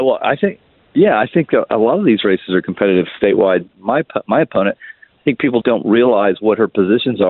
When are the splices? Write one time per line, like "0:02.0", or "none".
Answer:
0:03.7
0:05.6